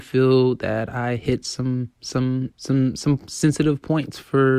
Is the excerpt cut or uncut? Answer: cut